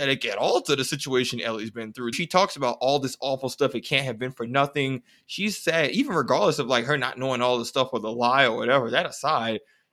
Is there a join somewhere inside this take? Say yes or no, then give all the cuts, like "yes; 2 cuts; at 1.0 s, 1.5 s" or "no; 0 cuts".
yes; 1 cut; at 2.1 s